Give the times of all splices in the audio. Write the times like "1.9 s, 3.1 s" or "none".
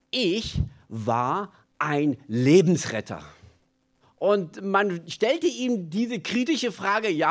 4.0 s